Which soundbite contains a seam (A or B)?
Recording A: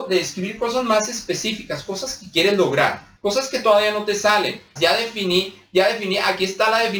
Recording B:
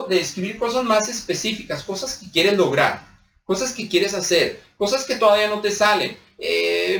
A